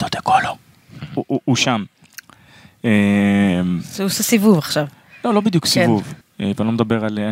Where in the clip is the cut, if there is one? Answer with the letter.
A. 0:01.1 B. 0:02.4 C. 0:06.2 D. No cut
C